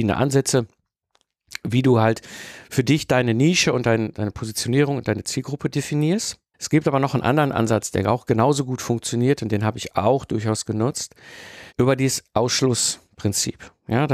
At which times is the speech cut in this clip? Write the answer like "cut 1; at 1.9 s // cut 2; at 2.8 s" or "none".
cut 1; at 6.5 s // cut 2; at 11.7 s

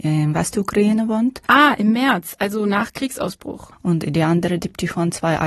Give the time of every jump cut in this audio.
cut 1; at 1.5 s // cut 2; at 3.7 s

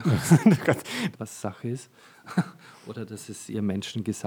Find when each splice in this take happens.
cut 1; at 1.1 s

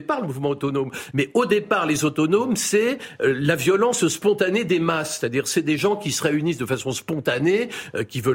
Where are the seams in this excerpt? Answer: cut 1; at 1.1 s

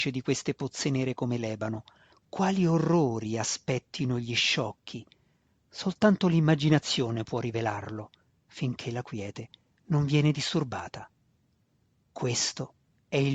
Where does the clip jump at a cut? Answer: cut 1; at 2.1 s

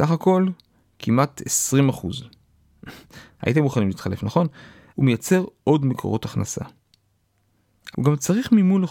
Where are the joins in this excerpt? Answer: cut 1; at 4.9 s // cut 2; at 7.9 s

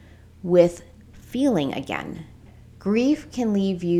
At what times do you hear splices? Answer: none

